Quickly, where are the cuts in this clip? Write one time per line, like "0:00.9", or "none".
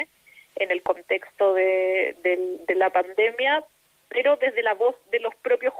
none